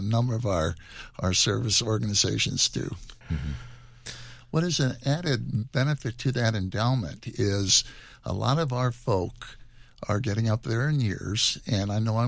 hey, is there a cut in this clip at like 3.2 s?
yes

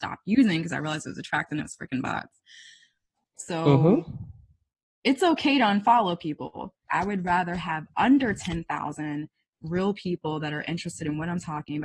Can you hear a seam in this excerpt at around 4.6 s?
no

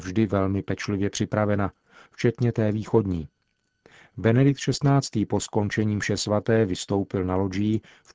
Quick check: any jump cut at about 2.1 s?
yes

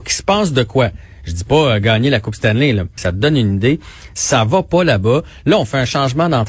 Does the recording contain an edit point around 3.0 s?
yes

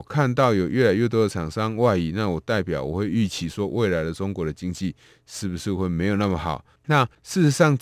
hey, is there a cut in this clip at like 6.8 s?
yes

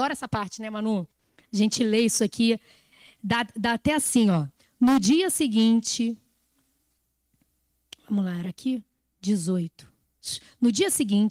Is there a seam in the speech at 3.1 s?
no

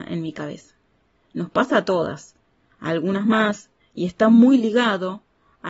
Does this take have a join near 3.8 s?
yes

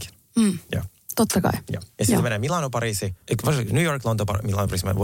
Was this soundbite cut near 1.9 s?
no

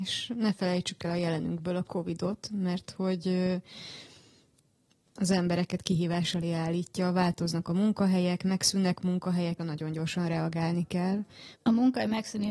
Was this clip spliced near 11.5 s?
yes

